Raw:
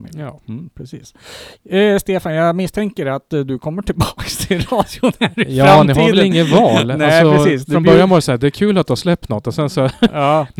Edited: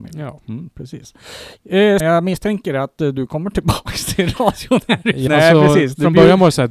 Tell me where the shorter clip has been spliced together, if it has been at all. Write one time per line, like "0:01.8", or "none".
0:02.0
0:05.3